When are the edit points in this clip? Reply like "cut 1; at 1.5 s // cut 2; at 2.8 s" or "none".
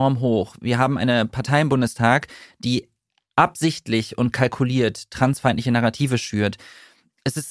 none